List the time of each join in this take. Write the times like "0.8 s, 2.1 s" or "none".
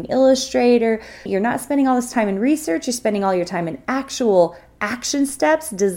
1.3 s